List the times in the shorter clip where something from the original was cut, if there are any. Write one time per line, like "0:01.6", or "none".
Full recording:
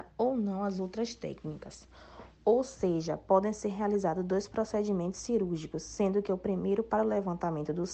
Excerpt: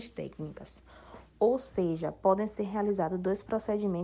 none